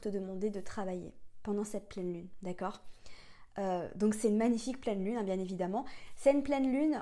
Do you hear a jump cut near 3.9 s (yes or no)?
no